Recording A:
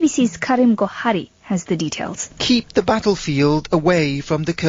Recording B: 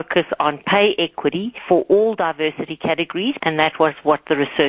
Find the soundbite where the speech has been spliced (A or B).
B